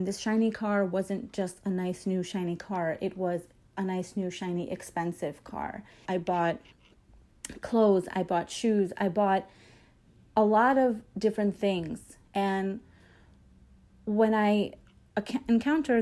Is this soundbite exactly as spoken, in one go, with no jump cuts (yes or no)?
no